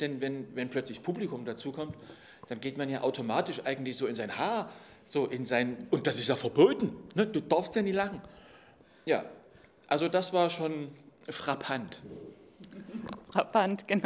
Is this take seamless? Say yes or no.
yes